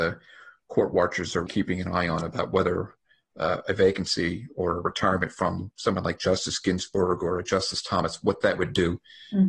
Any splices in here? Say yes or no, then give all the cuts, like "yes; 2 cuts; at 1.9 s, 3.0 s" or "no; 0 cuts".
yes; 1 cut; at 1.5 s